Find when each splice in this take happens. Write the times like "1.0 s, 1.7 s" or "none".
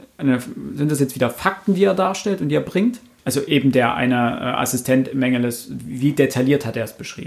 3.2 s